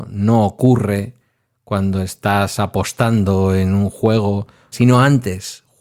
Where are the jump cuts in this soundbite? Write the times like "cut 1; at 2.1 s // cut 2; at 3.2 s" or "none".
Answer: cut 1; at 4.7 s